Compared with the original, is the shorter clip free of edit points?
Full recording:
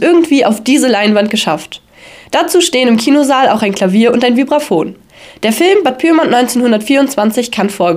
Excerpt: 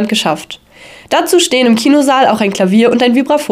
yes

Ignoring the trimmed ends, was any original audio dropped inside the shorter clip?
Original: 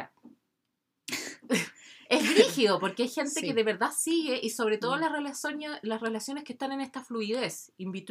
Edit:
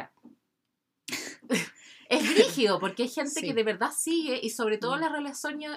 no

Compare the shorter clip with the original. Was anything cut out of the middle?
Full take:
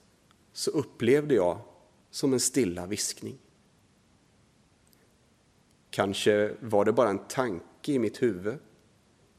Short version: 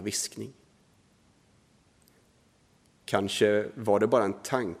no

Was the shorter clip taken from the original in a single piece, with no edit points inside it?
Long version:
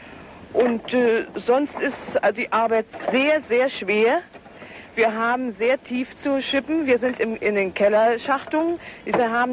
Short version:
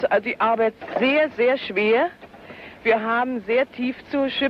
yes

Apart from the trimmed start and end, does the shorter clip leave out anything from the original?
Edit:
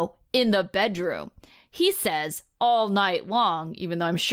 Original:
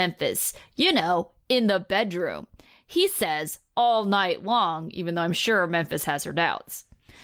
no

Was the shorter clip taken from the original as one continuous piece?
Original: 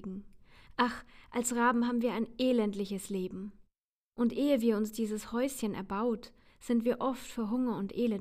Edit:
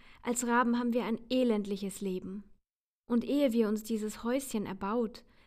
yes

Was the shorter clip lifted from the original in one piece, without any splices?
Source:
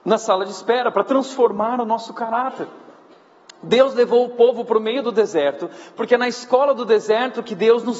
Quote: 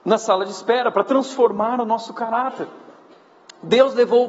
yes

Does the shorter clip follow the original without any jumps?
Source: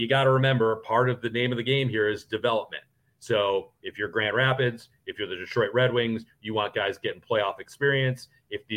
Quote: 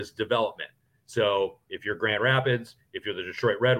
yes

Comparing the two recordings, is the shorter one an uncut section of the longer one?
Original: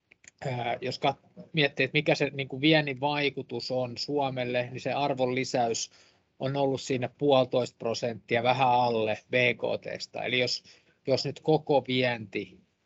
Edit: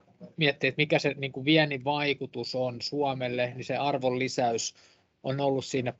yes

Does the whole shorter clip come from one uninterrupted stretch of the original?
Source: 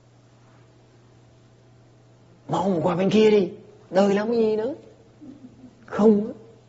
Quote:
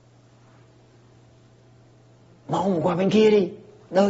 yes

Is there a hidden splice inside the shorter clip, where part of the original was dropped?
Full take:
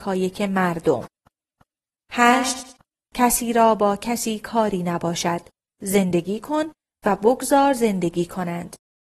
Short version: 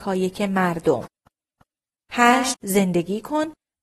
yes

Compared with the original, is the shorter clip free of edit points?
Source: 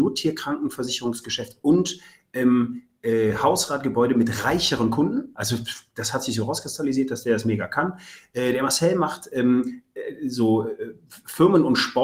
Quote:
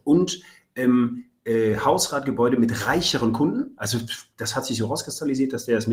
yes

